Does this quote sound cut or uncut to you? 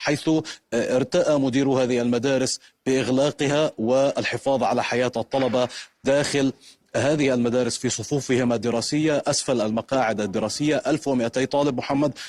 uncut